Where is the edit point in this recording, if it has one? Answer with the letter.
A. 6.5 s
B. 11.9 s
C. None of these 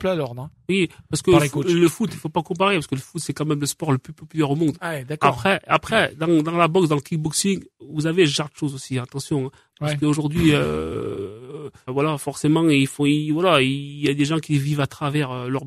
B